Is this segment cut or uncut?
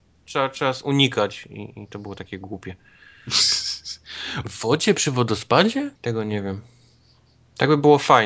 cut